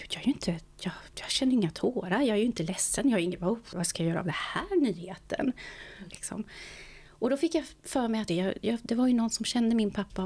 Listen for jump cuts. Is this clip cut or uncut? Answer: cut